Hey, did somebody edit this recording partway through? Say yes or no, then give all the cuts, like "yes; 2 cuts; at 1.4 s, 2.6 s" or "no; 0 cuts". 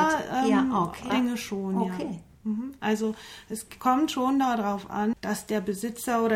yes; 2 cuts; at 1.1 s, 5.1 s